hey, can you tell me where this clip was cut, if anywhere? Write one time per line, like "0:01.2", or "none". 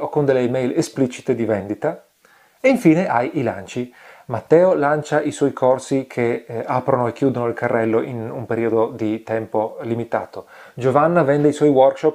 none